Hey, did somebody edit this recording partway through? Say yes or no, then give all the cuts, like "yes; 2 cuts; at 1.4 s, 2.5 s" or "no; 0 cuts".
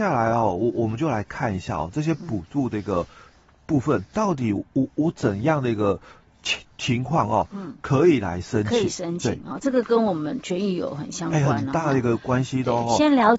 no; 0 cuts